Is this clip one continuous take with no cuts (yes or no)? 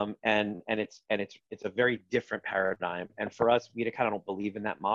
yes